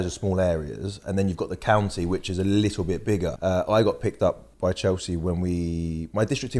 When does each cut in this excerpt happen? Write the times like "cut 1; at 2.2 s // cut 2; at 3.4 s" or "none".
cut 1; at 3.4 s // cut 2; at 4.5 s